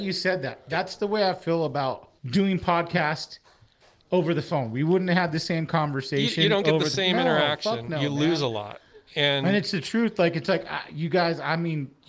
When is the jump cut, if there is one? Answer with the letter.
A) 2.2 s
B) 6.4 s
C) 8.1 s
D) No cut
A